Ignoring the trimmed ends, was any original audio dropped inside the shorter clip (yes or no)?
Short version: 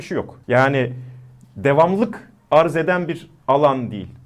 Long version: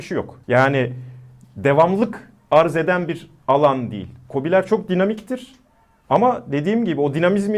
no